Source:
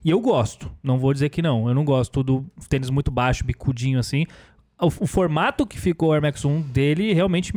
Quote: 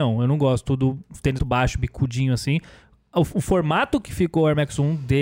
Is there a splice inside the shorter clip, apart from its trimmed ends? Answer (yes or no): yes